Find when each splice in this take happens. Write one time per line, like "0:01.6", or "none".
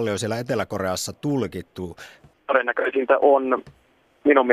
0:02.3